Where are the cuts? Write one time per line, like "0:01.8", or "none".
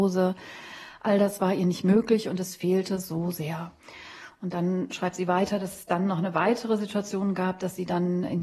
none